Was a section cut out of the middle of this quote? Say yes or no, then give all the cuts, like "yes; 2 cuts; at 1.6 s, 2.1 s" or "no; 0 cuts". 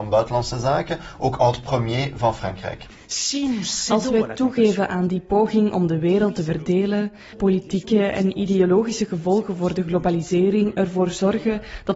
yes; 1 cut; at 7.3 s